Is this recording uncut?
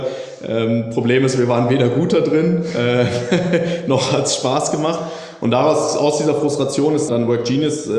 no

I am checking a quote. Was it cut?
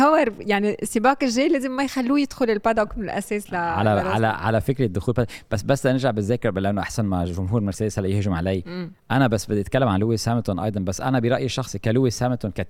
no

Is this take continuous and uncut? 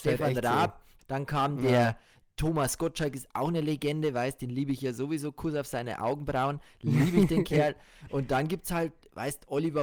no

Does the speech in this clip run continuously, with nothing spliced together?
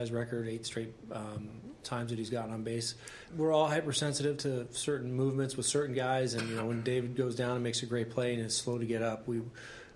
no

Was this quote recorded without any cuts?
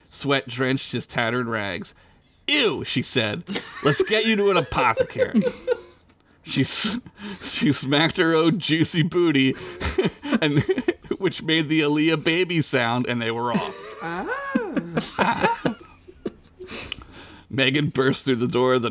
yes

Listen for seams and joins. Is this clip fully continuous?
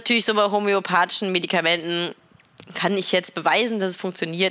yes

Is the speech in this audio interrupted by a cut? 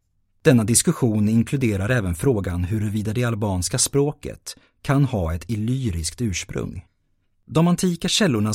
yes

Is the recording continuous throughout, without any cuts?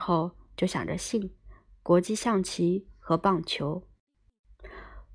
yes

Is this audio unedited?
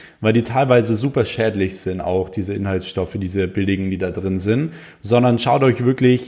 yes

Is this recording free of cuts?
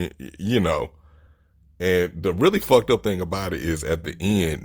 yes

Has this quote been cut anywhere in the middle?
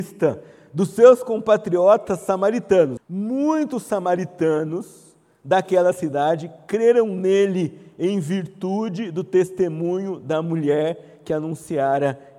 yes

